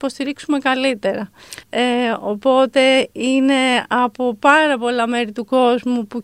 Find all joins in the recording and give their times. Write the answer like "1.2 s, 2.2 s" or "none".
1.6 s